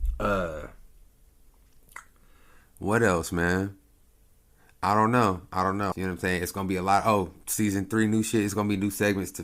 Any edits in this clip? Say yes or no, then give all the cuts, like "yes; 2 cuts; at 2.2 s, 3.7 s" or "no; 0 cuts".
yes; 1 cut; at 5.9 s